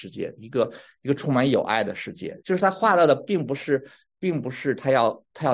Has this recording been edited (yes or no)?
yes